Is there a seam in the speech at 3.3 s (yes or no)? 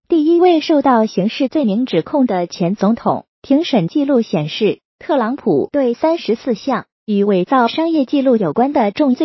yes